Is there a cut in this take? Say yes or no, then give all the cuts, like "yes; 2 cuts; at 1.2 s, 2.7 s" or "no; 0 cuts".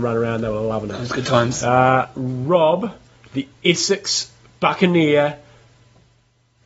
no; 0 cuts